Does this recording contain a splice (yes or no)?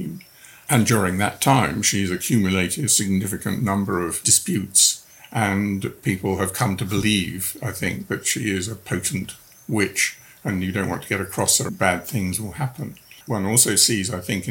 yes